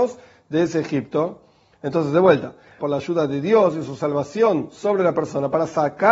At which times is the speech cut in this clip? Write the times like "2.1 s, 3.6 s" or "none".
2.8 s